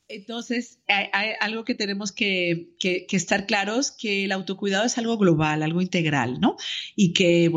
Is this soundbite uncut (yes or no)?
yes